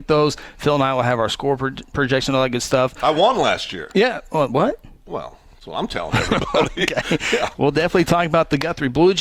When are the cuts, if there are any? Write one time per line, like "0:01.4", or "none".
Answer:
0:05.0
0:07.5